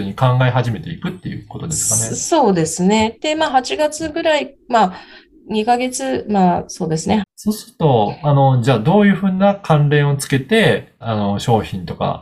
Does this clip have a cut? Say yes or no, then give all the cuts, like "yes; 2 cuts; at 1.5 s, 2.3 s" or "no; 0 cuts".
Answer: yes; 3 cuts; at 7.2 s, 8.6 s, 11.0 s